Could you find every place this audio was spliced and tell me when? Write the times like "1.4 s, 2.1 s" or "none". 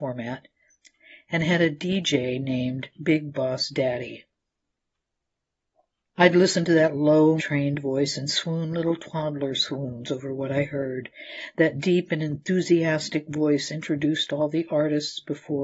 7.4 s